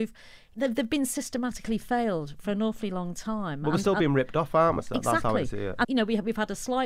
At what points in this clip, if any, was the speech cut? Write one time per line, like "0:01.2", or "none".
0:04.8
0:05.8